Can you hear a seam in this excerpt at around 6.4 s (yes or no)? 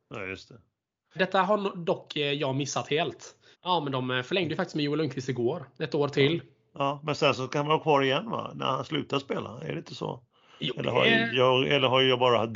no